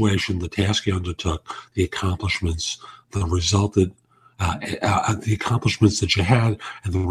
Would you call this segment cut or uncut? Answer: uncut